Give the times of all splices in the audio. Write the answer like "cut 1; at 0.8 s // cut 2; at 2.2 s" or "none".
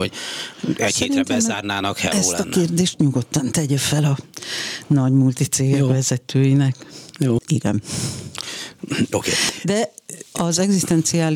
cut 1; at 7.4 s